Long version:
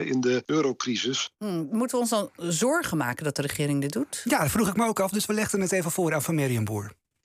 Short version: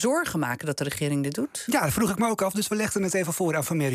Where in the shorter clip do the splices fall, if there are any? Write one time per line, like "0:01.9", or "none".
none